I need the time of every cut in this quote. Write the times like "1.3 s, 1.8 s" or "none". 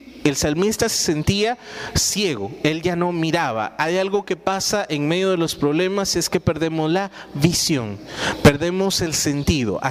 none